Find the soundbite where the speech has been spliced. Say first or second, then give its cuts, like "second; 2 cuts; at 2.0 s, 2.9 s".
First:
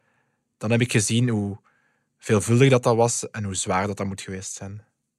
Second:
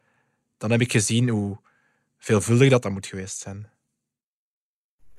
second; 1 cut; at 2.8 s